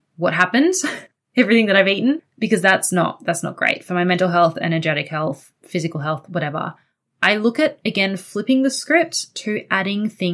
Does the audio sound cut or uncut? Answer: uncut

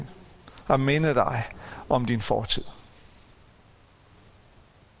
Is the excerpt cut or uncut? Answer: uncut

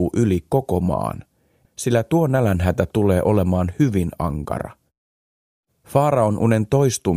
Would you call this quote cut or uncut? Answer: cut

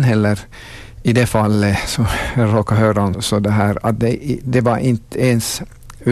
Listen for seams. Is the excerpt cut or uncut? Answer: cut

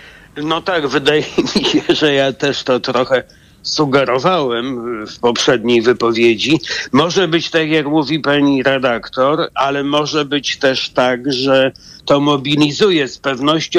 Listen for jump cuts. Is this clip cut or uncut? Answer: uncut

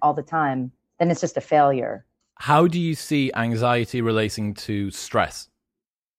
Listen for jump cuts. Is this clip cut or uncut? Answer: cut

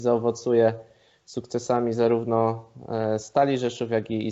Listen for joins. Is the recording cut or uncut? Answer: uncut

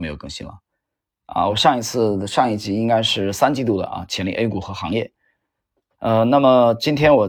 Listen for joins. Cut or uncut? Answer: uncut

